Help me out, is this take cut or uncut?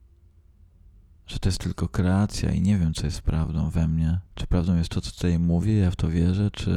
cut